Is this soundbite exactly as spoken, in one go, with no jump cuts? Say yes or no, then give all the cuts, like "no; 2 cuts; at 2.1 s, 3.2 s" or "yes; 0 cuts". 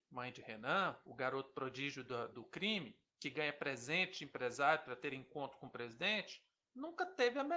no; 1 cut; at 2.3 s